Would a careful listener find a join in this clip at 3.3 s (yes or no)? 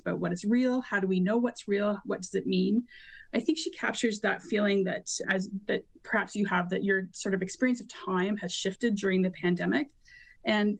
no